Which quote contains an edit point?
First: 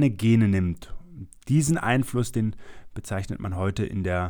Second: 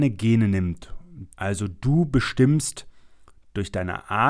second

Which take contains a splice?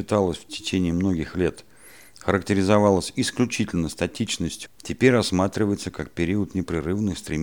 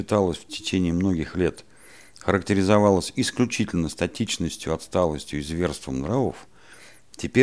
first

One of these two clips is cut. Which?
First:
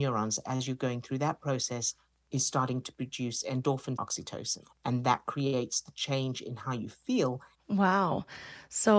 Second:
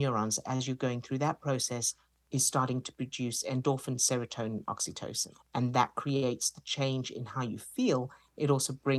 first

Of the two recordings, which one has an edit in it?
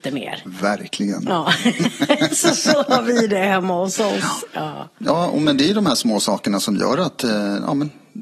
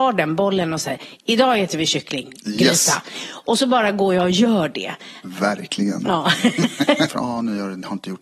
second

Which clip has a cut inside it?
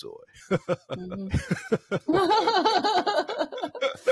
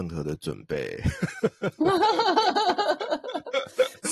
first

